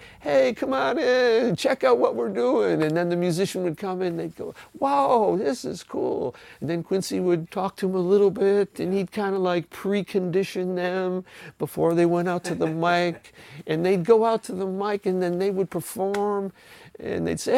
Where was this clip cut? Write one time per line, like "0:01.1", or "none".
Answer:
0:07.4